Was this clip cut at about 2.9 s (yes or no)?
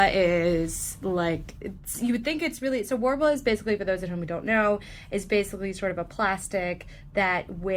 no